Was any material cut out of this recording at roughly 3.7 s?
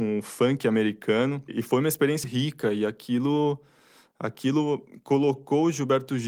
no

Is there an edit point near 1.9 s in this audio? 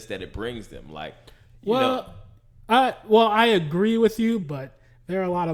no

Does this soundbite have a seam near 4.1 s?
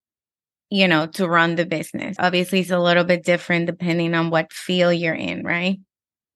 no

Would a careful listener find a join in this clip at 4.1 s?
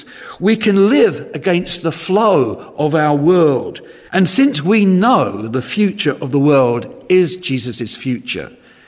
yes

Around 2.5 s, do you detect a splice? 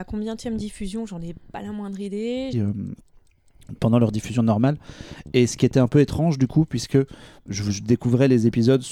yes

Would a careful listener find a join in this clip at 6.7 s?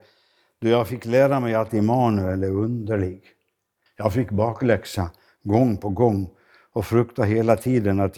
no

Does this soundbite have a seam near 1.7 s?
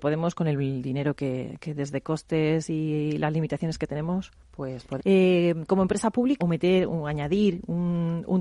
no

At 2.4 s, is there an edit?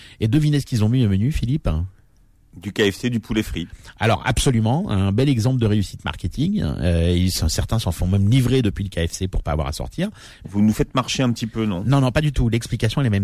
no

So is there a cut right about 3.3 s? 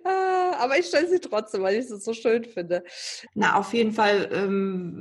yes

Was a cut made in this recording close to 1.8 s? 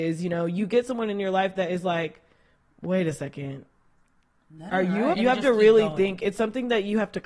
no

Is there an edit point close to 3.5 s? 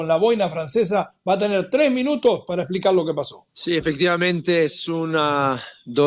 yes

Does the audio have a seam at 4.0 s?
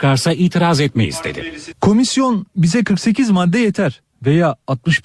no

